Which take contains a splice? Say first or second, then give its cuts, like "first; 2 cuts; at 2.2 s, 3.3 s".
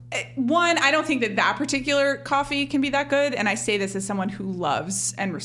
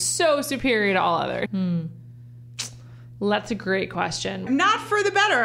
second; 2 cuts; at 1.5 s, 4.5 s